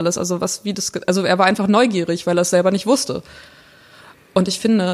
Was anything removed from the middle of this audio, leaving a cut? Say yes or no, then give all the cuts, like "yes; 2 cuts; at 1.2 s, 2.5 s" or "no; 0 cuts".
no; 0 cuts